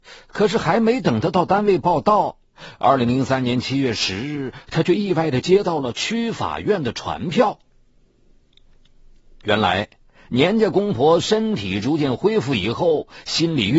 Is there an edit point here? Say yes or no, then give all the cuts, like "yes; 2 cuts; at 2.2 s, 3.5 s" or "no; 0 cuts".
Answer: no; 0 cuts